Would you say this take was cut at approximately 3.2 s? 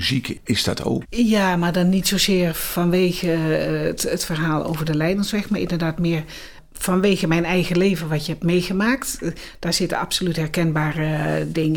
no; 1 cut; at 1.0 s

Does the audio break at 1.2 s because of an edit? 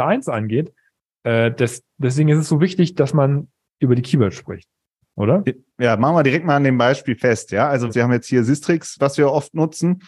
no; 2 cuts; at 7.9 s, 9.0 s

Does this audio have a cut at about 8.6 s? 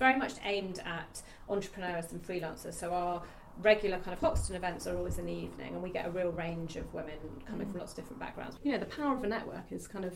yes; 1 cut; at 8.6 s

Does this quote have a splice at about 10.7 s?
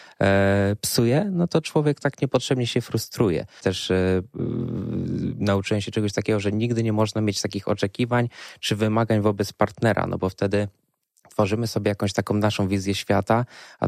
no; 1 cut; at 3.6 s

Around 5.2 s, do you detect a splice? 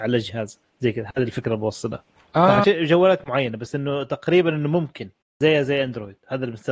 no; 1 cut; at 2.6 s

